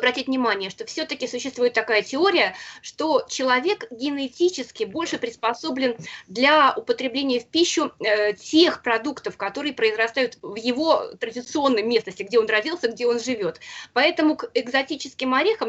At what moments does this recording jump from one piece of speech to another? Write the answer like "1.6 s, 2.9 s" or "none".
none